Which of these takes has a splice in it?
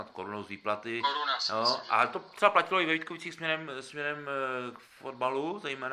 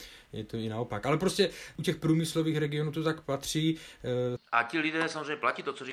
second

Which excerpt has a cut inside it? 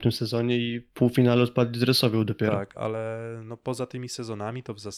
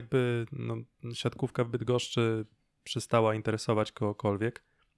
first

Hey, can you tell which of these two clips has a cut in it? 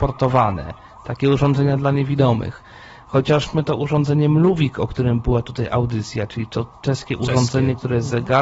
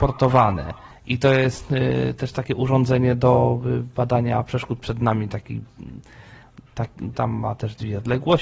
second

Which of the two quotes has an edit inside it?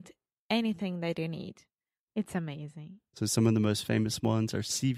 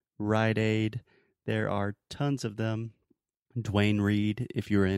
first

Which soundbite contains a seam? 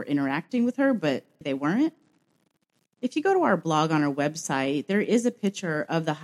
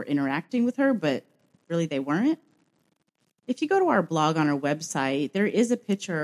first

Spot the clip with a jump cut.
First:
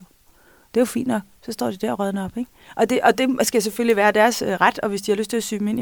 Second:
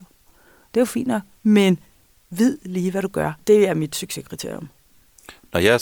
second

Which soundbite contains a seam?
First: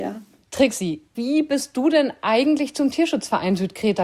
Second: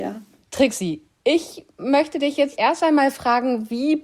first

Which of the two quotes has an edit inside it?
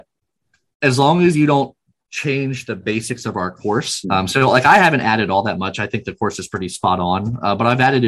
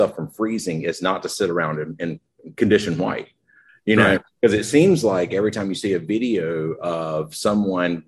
first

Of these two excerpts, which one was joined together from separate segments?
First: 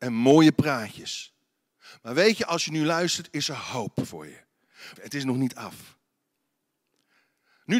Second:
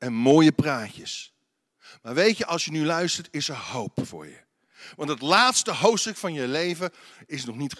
first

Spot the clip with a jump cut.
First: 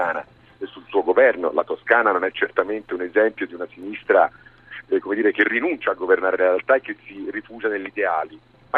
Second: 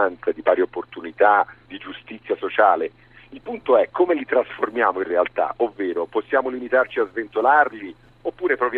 second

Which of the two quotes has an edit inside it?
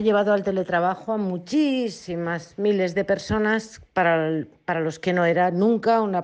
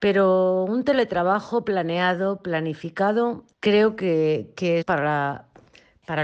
second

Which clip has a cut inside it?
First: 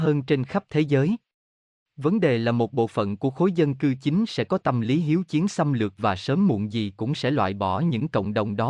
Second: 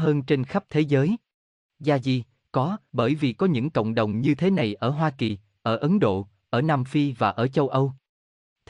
second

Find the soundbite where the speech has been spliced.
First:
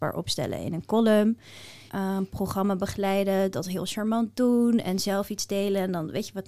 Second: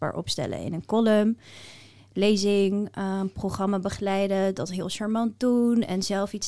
first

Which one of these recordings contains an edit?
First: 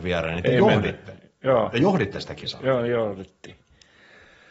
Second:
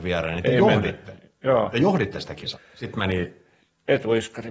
second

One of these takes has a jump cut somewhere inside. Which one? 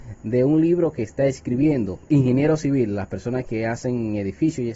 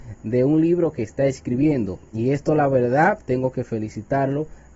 first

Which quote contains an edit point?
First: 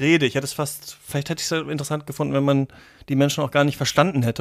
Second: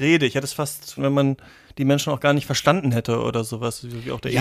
second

